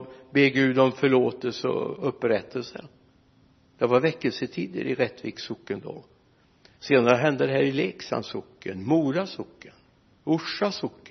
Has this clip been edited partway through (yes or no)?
no